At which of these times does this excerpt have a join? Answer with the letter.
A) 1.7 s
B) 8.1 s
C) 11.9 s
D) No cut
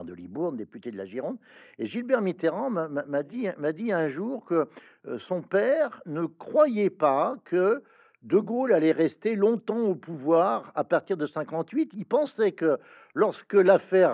D